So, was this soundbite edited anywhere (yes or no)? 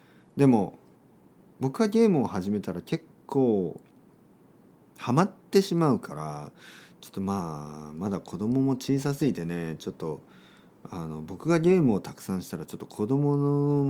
no